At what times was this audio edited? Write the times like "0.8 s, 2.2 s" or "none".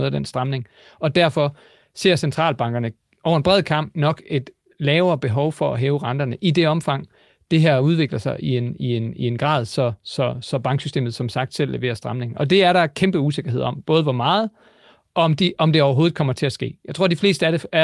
none